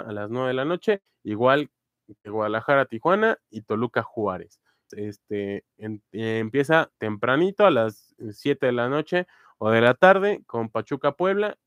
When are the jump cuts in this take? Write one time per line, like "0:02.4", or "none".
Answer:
0:04.9
0:06.9